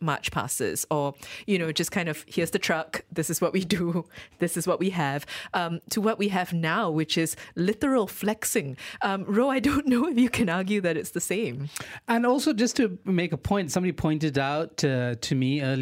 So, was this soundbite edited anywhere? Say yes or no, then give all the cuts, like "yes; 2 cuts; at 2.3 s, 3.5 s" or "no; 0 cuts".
no; 0 cuts